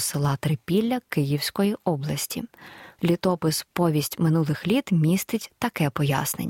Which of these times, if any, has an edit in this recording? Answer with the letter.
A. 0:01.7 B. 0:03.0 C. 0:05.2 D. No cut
B